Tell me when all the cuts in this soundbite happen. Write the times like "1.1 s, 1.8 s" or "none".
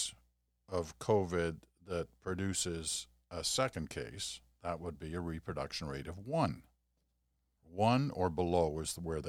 7.6 s